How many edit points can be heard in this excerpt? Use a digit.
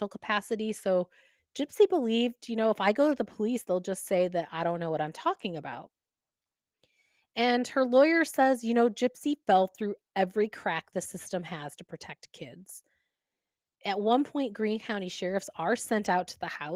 0